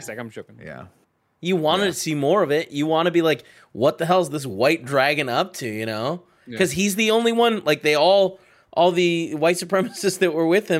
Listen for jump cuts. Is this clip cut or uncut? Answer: uncut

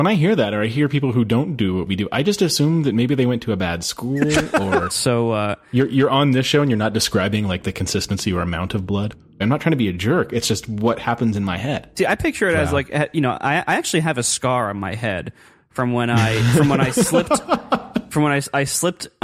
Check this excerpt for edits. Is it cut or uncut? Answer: cut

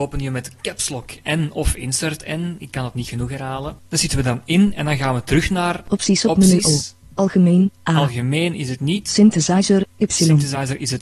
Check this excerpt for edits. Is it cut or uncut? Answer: cut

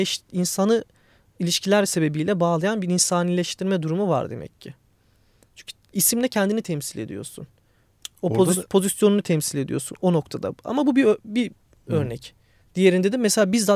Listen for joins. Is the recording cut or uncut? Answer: uncut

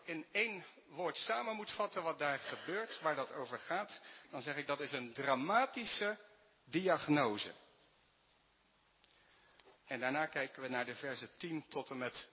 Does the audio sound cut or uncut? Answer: cut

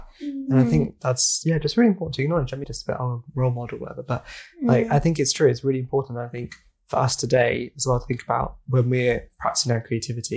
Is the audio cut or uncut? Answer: cut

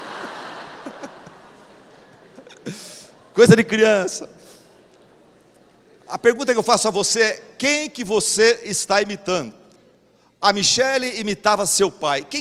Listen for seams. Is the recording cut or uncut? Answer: uncut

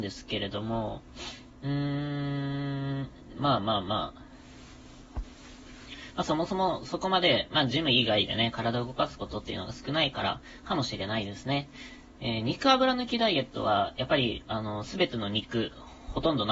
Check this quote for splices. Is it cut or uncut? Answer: uncut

